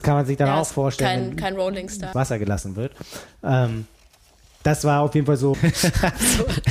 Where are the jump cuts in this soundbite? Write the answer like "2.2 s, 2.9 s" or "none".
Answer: 2.1 s, 5.5 s